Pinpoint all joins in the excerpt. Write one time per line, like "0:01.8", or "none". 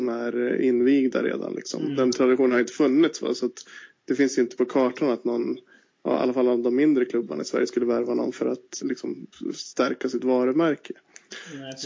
0:08.8

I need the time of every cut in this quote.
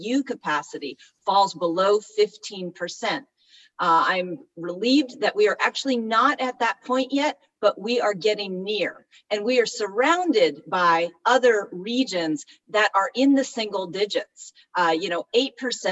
none

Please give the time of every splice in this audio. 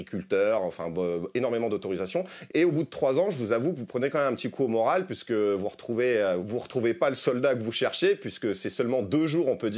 0:02.5
0:06.4

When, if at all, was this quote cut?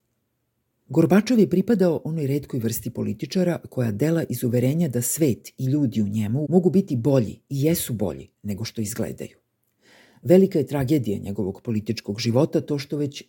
0:06.5

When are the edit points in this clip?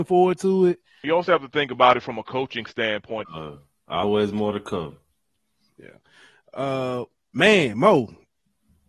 0:01.0
0:03.2

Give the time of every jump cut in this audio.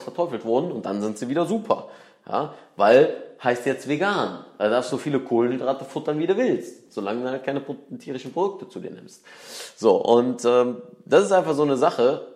none

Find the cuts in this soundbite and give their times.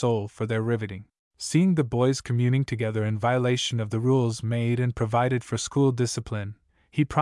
0:01.2

